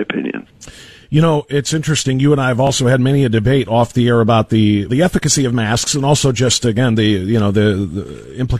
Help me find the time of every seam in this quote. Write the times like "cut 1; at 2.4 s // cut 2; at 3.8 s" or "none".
cut 1; at 4.9 s